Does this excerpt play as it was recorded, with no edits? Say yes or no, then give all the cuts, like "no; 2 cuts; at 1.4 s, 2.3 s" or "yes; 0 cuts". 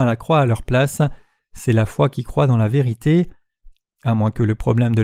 yes; 0 cuts